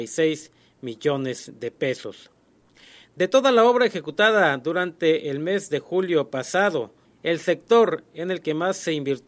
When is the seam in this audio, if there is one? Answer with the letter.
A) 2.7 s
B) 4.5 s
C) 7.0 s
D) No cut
C